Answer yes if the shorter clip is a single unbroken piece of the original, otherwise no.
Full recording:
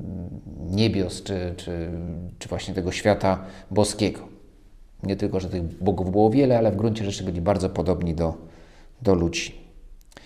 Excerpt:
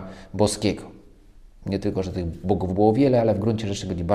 yes